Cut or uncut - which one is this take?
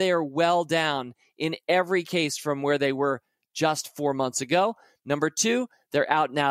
uncut